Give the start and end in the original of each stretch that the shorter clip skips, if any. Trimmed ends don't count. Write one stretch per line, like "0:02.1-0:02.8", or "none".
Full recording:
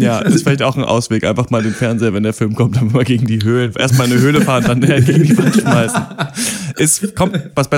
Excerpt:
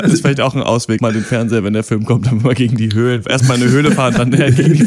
0:01.2-0:01.5